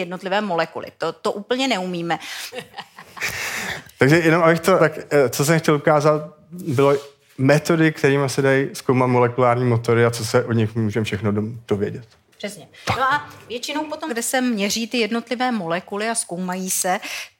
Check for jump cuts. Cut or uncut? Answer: cut